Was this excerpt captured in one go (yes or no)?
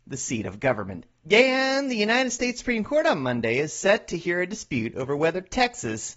no